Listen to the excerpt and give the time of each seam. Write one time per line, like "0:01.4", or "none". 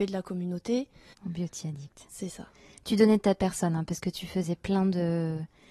0:01.1